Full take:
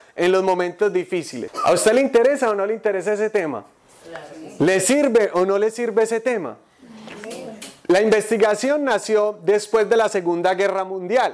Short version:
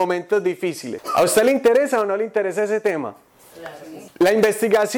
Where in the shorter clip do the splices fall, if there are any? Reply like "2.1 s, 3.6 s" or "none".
4.1 s